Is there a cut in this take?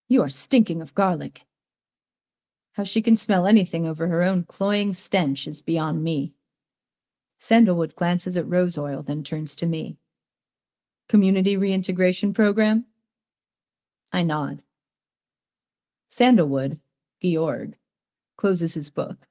yes; 2 cuts; at 2.6 s, 16.0 s

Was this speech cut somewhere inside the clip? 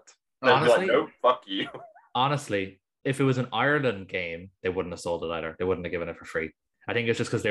yes; 2 cuts; at 3.0 s, 4.5 s

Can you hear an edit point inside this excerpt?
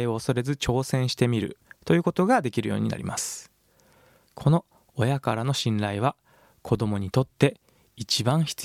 no; 0 cuts

